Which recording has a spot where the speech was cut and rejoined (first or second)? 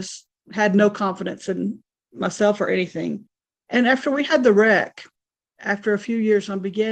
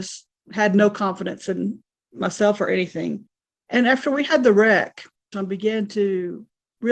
second